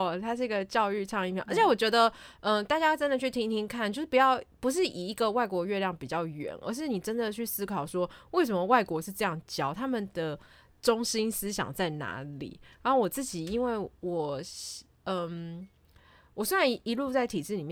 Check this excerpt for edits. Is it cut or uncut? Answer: uncut